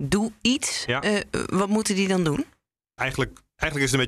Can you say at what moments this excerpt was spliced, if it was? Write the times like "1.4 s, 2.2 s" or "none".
3.0 s